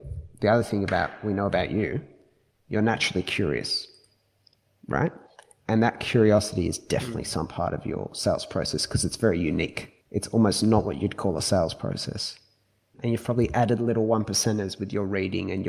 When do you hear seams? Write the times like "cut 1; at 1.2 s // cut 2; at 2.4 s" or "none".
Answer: cut 1; at 10.0 s // cut 2; at 12.9 s